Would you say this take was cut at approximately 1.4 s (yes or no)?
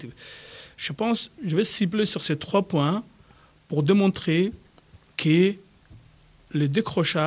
yes